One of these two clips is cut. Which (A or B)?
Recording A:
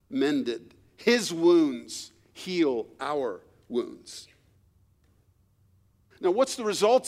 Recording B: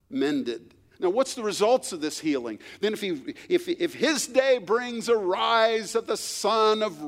B